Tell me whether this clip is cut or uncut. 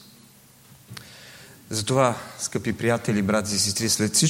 uncut